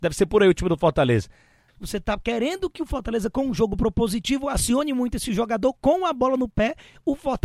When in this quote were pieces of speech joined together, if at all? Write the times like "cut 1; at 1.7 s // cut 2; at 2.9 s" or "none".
cut 1; at 1.7 s